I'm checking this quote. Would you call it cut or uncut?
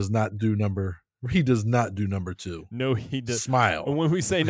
uncut